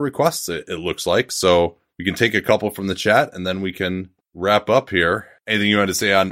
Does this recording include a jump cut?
yes; 1 cut; at 5.4 s

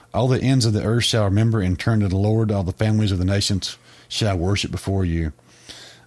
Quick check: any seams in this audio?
no; 0 cuts

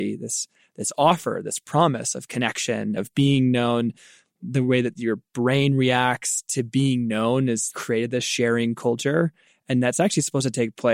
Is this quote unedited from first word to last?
no; 2 cuts; at 3.0 s, 7.7 s

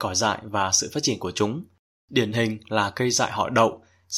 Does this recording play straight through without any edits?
yes; 0 cuts

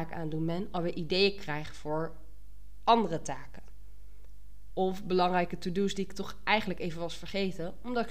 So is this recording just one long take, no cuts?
yes; 0 cuts

